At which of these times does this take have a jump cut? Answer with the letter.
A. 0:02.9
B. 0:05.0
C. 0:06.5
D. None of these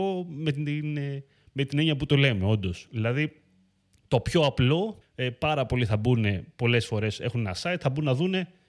B